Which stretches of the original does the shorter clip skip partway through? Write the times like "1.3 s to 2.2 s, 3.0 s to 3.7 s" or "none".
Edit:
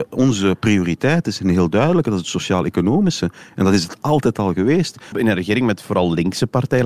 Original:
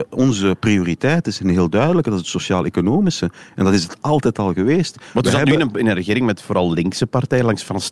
5.1 s to 5.7 s